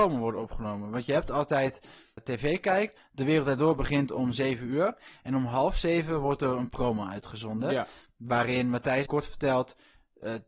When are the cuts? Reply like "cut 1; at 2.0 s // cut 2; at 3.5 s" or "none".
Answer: cut 1; at 2.2 s // cut 2; at 9.1 s